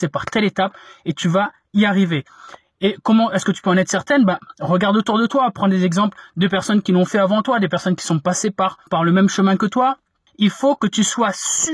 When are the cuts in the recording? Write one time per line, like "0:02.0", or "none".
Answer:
0:08.9
0:10.3